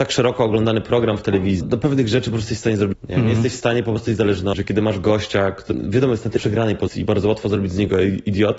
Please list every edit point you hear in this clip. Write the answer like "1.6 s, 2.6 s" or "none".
none